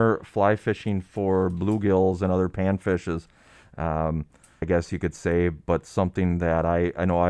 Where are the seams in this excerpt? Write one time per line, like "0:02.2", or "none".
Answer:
0:04.6